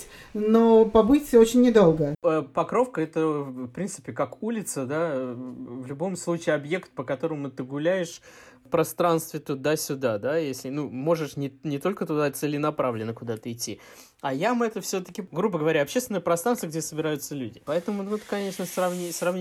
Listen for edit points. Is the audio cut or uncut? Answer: uncut